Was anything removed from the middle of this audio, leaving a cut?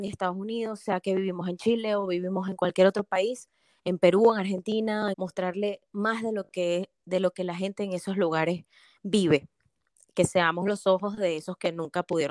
yes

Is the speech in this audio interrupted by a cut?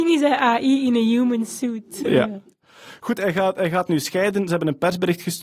no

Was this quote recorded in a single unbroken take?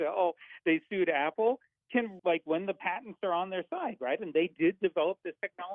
no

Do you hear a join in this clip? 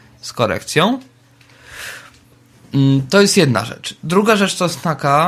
no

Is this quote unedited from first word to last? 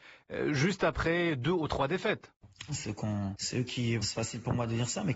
no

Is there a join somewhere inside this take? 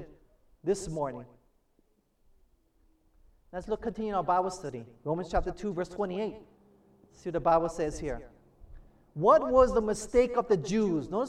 no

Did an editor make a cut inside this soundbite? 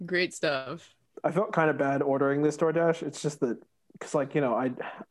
no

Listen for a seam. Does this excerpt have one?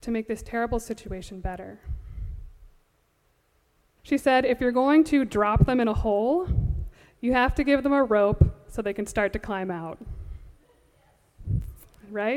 yes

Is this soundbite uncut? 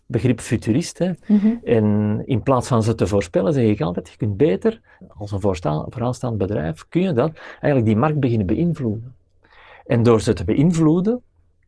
no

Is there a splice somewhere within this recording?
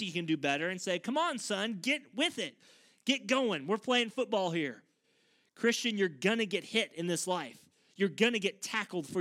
no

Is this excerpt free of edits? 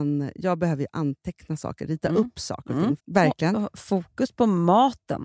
no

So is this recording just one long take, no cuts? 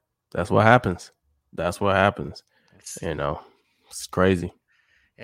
yes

